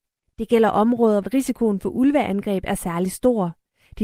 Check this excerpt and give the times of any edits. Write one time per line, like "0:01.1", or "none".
0:01.2